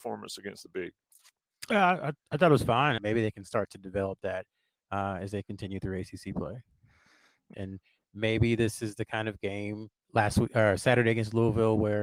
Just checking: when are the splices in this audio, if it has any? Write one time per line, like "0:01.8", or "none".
0:03.0
0:07.5
0:10.0